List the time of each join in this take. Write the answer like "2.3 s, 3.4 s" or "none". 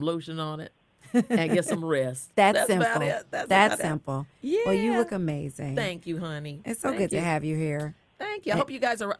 none